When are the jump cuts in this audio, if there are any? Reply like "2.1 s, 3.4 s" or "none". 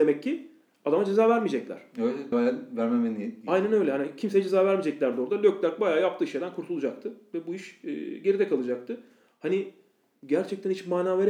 2.3 s